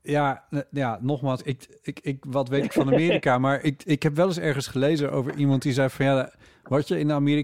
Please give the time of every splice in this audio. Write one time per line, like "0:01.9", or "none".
none